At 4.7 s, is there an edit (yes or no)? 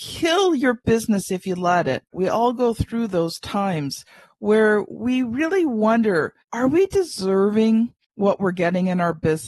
no